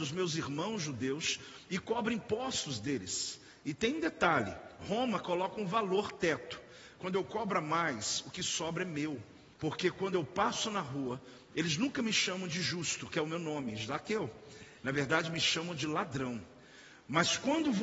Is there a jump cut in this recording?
yes; 1 cut; at 9.5 s

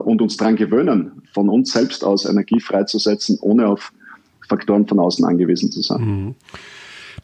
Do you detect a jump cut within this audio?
no; 0 cuts

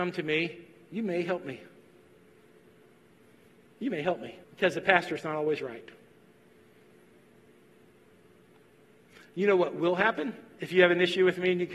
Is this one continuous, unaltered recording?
no; 1 cut; at 4.4 s

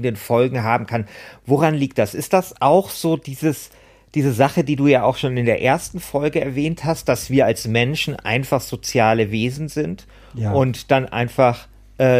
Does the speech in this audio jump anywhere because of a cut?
no; 0 cuts

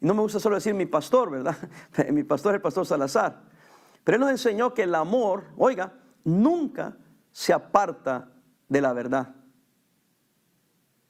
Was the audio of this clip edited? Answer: no; 0 cuts

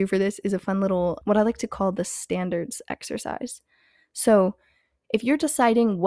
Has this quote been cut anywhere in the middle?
yes; 1 cut; at 1.2 s

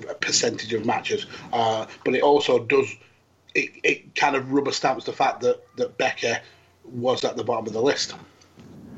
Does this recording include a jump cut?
no; 0 cuts

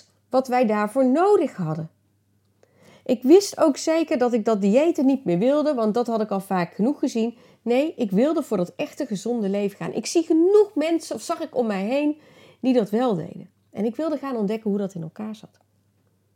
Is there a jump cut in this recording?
no; 0 cuts

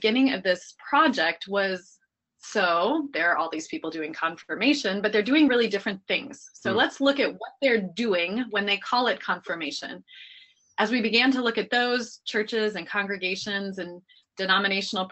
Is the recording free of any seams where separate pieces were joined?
yes; 0 cuts

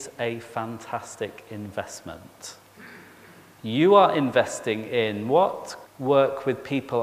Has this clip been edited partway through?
yes; 1 cut; at 5.8 s

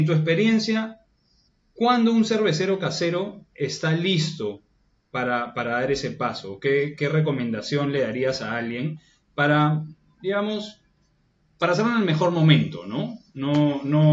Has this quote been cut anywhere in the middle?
no; 0 cuts

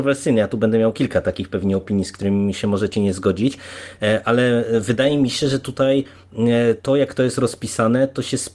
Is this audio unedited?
yes; 0 cuts

